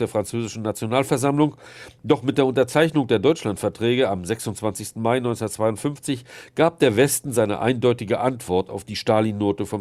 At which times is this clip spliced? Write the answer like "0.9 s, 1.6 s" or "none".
none